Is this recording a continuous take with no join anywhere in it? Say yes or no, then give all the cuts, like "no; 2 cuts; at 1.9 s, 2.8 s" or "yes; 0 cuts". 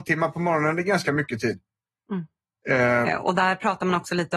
no; 1 cut; at 3.0 s